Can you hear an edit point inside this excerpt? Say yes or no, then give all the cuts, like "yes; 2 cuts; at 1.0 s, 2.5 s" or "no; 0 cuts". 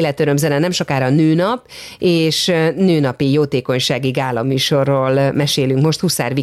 no; 0 cuts